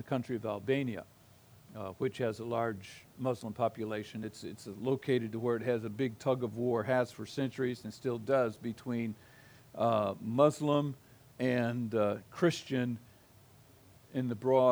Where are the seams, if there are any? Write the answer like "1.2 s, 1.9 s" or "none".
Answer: none